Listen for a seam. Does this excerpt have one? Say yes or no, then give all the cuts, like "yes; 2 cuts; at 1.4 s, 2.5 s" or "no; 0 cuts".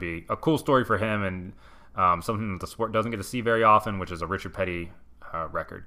no; 0 cuts